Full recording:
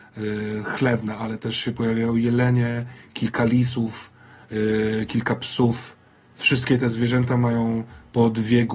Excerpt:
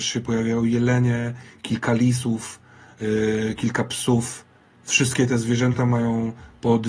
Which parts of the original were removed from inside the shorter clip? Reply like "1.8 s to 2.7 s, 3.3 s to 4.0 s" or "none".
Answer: none